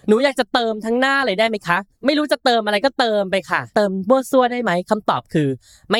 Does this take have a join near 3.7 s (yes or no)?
yes